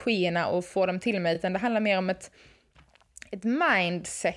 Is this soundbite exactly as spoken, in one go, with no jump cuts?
yes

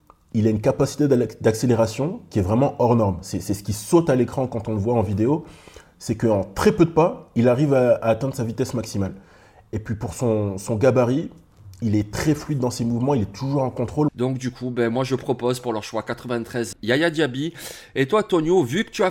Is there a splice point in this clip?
yes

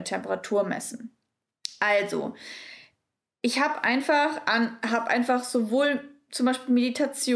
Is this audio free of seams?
yes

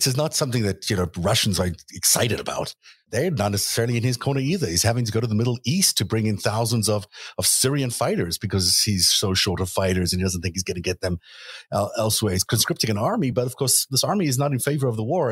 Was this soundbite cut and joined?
no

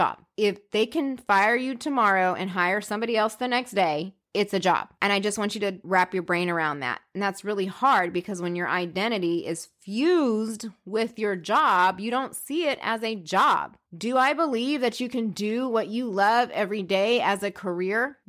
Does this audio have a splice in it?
no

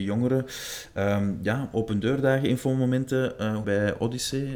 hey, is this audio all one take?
no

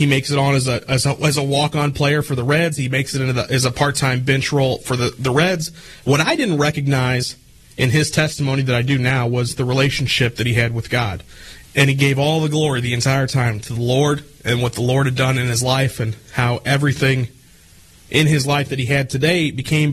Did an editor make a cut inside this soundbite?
yes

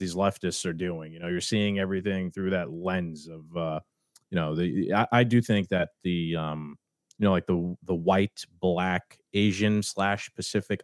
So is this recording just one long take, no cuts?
yes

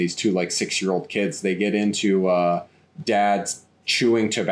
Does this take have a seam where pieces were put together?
yes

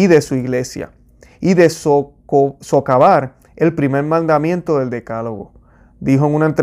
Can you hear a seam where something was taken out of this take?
no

